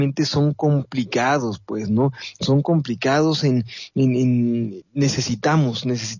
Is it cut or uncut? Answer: cut